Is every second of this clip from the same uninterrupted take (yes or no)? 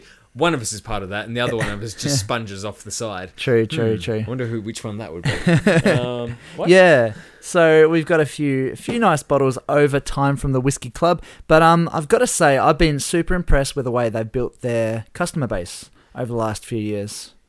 yes